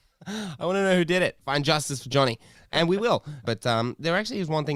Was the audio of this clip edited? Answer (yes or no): yes